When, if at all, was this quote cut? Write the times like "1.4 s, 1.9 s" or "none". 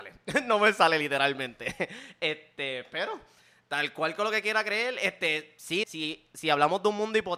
5.8 s